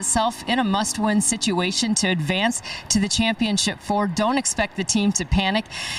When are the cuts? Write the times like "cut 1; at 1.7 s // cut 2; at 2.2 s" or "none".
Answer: none